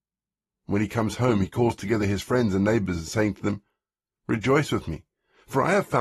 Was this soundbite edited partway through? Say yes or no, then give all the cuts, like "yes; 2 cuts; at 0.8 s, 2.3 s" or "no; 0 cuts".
no; 0 cuts